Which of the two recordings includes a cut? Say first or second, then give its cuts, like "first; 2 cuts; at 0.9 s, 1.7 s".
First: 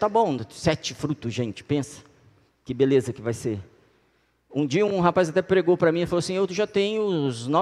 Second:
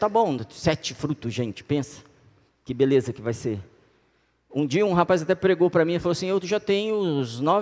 second; 1 cut; at 4.9 s